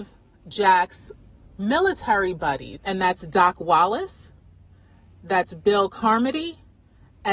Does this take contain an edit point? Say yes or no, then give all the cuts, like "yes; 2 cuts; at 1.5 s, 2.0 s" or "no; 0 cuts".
yes; 1 cut; at 2.8 s